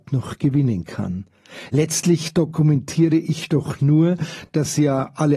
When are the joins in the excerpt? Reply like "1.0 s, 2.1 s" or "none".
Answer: none